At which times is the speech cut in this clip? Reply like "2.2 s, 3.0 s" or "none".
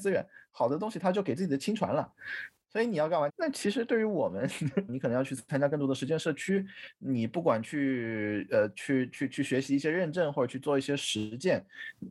3.3 s, 4.9 s